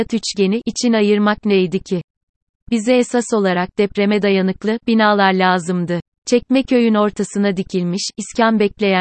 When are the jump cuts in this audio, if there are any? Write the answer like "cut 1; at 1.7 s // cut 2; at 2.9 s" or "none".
cut 1; at 6.1 s